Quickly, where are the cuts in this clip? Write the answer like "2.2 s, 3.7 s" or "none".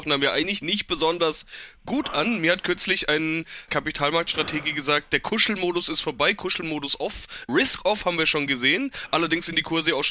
none